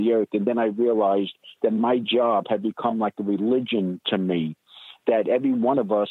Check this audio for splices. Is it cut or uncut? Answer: uncut